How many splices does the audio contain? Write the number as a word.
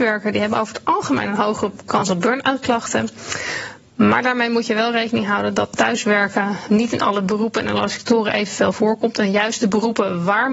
one